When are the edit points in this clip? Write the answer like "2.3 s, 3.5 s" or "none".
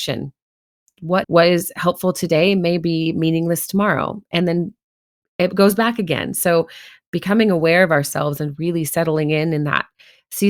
1.2 s